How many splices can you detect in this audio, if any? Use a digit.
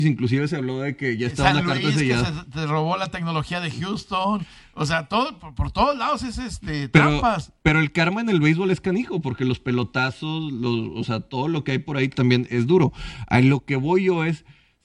1